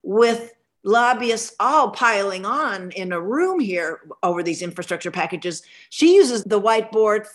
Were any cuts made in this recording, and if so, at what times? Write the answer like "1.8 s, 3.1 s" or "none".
6.4 s